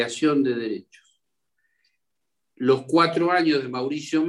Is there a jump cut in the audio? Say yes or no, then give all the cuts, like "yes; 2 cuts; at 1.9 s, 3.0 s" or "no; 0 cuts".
no; 0 cuts